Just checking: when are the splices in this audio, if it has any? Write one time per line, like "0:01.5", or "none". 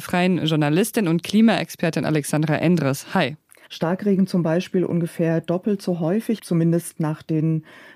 0:03.7
0:06.4